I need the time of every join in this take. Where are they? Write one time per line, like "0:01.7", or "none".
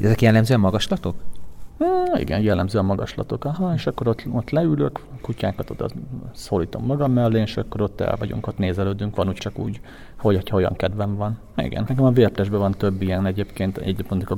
0:09.4
0:11.9